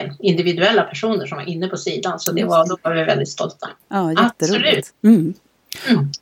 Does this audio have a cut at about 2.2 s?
no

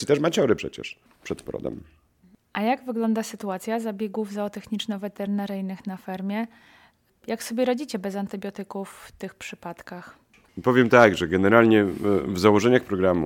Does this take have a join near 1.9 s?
no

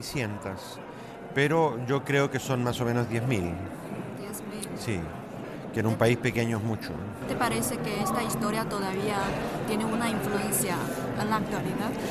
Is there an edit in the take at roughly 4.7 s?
no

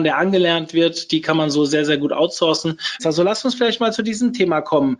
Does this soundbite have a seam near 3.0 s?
yes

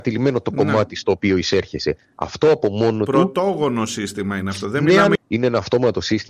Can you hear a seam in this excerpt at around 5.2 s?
yes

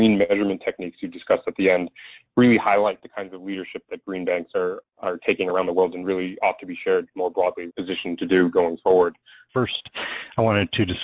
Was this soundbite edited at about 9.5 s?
yes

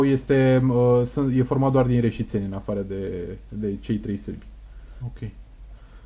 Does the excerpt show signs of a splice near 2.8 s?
no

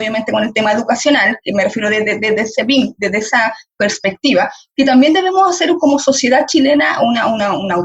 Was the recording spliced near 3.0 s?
no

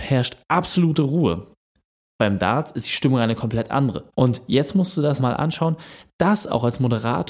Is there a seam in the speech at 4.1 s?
yes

